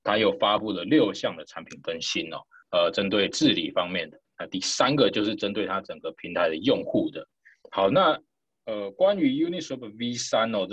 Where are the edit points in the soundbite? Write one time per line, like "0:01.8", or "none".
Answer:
0:02.6
0:07.6